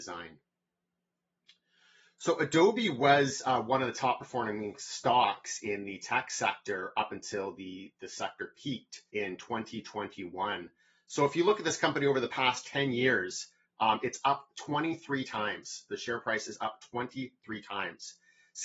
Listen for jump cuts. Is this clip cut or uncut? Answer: cut